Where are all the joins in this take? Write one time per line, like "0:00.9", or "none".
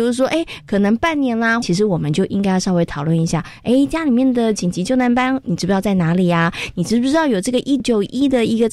0:01.6
0:07.8